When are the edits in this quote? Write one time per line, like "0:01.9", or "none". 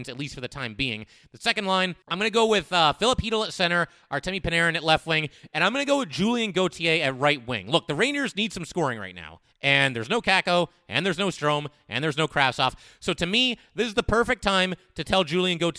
0:02.0